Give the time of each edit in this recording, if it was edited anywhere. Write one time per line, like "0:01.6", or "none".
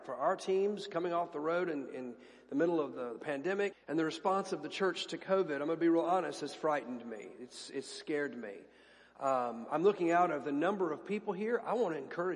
0:03.7